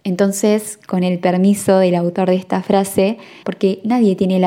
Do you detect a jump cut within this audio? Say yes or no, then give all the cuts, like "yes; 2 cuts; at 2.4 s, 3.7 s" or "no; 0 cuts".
yes; 1 cut; at 3.4 s